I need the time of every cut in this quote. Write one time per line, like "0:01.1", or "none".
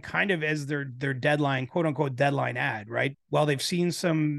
0:03.1